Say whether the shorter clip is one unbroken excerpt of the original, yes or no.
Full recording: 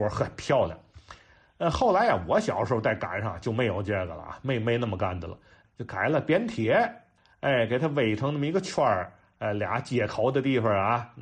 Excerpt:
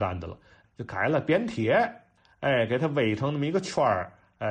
yes